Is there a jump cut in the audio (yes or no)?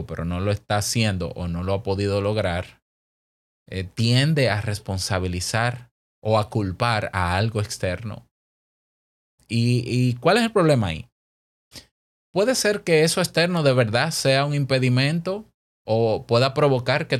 no